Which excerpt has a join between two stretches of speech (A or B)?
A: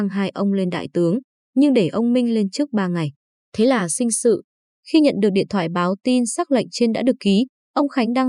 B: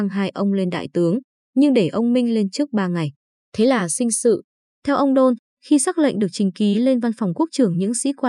B